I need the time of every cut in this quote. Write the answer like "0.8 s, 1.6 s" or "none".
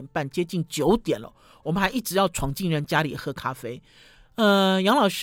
2.8 s